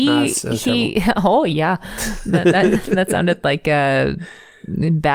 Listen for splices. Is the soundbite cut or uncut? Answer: uncut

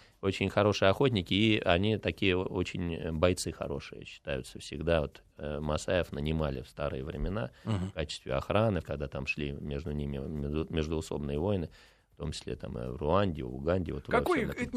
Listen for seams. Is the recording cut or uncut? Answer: cut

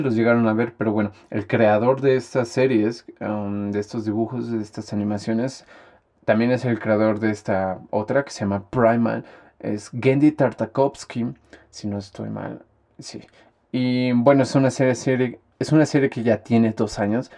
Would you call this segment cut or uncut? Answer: cut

